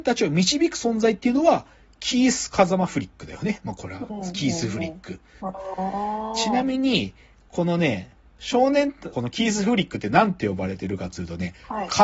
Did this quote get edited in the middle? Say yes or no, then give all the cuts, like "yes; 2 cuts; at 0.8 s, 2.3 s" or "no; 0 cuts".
yes; 2 cuts; at 5.4 s, 9.1 s